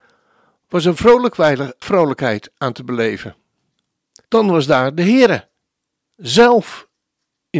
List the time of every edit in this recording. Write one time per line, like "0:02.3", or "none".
0:01.8
0:04.3
0:06.1